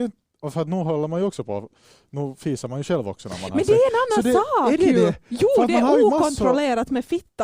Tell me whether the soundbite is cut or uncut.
uncut